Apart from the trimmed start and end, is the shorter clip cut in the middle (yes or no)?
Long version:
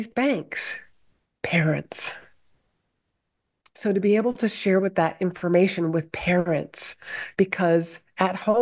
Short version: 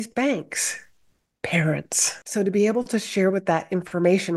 yes